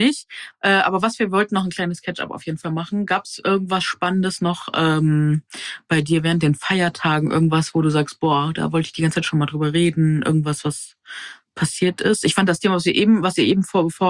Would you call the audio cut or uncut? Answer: uncut